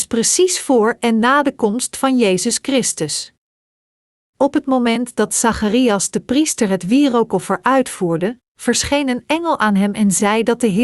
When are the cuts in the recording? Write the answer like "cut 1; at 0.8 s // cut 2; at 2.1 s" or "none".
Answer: none